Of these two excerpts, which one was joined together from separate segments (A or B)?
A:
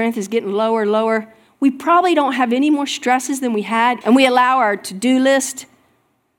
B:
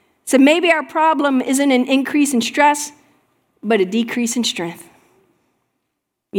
A